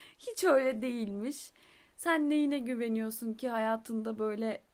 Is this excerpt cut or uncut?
uncut